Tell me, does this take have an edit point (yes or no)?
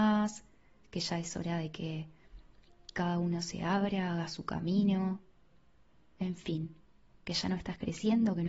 no